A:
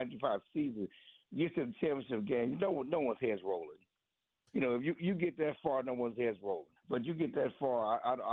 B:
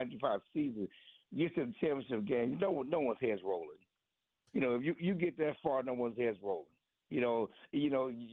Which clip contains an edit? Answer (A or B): A